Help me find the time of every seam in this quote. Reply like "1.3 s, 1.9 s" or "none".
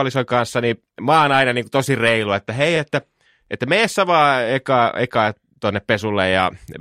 none